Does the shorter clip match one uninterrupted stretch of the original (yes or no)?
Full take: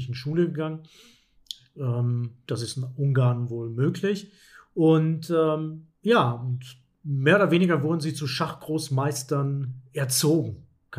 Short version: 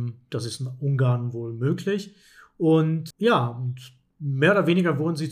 no